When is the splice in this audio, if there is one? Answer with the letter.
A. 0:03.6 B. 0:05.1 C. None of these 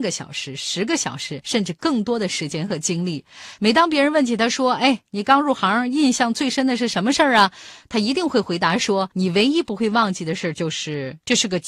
A